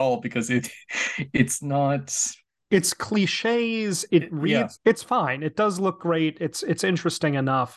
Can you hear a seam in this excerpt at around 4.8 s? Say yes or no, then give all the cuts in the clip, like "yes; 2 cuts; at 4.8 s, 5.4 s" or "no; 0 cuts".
yes; 1 cut; at 4.8 s